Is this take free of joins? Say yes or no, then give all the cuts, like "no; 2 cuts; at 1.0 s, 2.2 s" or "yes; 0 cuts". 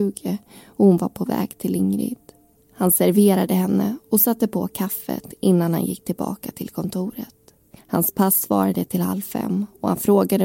no; 2 cuts; at 2.6 s, 7.8 s